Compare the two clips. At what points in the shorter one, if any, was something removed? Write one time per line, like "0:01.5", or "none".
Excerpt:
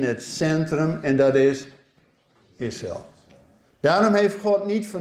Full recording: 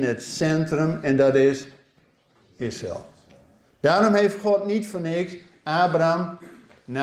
none